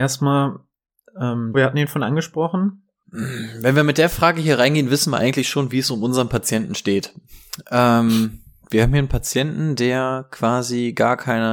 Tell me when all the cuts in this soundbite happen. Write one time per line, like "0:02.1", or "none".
0:01.5
0:03.0